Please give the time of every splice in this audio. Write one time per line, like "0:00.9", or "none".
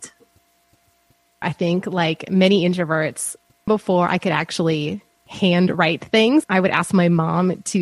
0:01.4
0:03.7
0:06.4